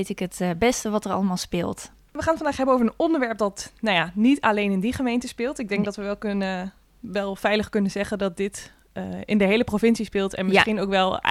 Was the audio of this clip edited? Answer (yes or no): no